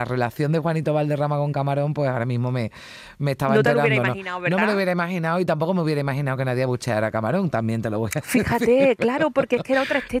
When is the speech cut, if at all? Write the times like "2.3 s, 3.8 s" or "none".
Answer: none